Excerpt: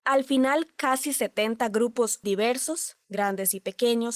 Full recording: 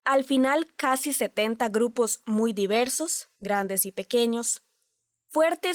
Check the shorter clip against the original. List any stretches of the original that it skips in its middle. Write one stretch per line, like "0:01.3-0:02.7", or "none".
0:02.2-0:02.6